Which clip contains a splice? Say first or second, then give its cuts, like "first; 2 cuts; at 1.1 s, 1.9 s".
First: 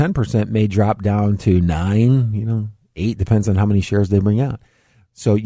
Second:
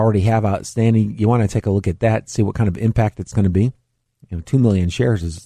second; 1 cut; at 4.2 s